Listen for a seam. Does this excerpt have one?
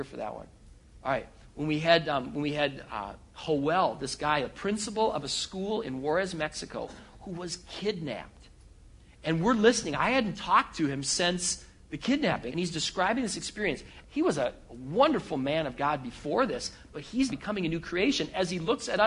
yes; 3 cuts; at 12.5 s, 14.0 s, 17.3 s

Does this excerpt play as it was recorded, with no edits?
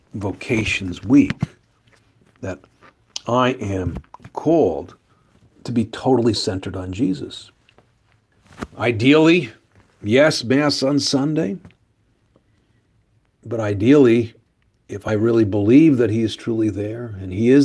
yes; 0 cuts

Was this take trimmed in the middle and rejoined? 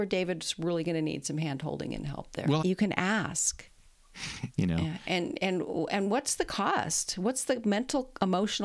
yes; 2 cuts; at 2.6 s, 3.7 s

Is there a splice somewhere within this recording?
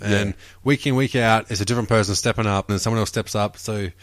yes; 1 cut; at 2.7 s

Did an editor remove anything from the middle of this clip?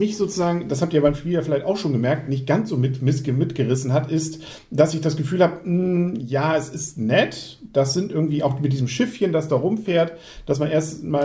no; 0 cuts

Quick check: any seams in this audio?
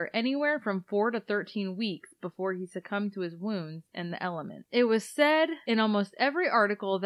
yes; 1 cut; at 4.7 s

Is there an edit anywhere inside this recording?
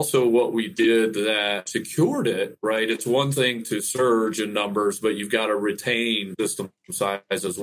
no; 0 cuts

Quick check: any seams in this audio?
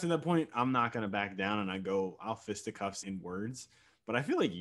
yes; 1 cut; at 3.0 s

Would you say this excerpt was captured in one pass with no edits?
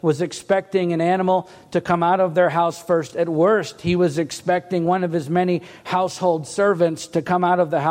yes; 0 cuts

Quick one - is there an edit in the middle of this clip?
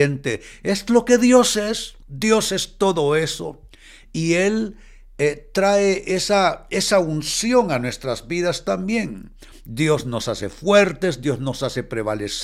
yes; 1 cut; at 2.0 s

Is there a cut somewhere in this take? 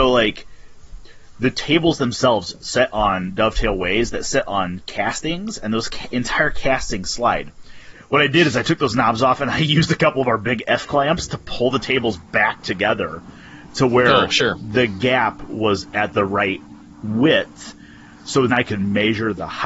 yes; 2 cuts; at 7.9 s, 18.5 s

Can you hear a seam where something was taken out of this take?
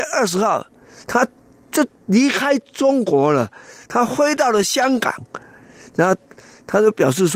no; 0 cuts

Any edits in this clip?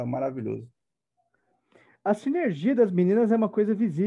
no; 0 cuts

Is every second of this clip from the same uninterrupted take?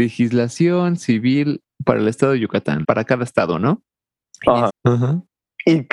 no; 2 cuts; at 2.8 s, 4.7 s

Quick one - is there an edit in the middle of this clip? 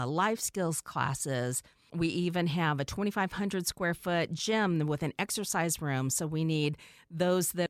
no; 0 cuts

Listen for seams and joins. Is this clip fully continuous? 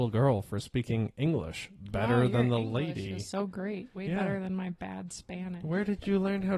yes; 0 cuts

